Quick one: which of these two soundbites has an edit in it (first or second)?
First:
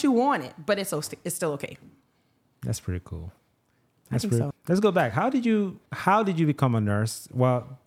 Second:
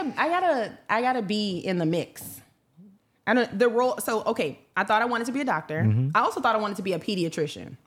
first